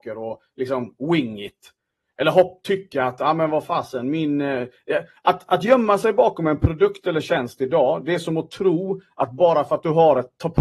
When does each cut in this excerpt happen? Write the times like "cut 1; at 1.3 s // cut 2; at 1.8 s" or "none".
none